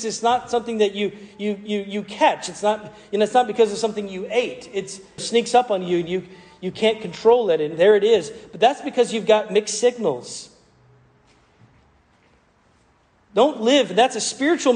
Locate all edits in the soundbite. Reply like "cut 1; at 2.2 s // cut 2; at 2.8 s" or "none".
cut 1; at 5.2 s